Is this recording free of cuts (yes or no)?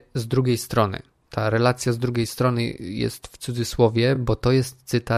yes